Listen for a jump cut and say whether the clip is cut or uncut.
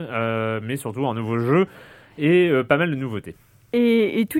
uncut